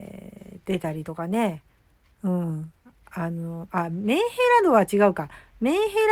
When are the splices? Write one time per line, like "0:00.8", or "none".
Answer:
none

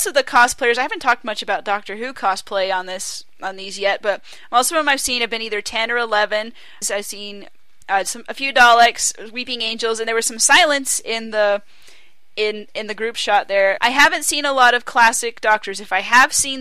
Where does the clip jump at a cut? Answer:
0:06.8
0:13.8

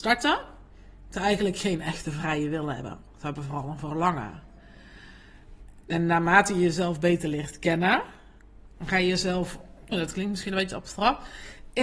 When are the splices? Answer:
0:05.8
0:09.9

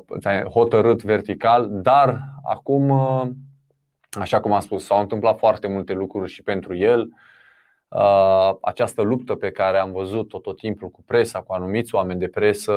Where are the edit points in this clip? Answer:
none

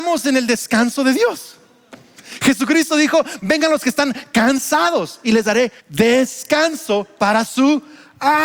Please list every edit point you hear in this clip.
0:05.8

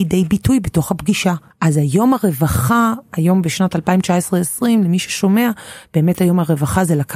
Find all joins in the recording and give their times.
0:01.5

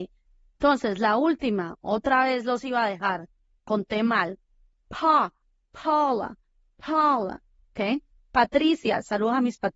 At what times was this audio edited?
0:04.7

